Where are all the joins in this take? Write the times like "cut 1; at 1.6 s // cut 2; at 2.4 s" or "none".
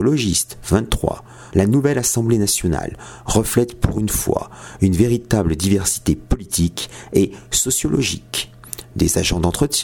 cut 1; at 1.5 s